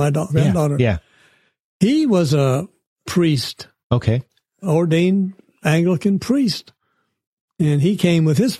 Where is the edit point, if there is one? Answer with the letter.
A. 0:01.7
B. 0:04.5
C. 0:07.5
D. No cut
D